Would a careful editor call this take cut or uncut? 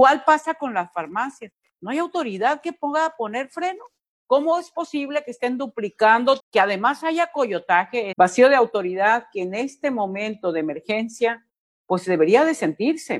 cut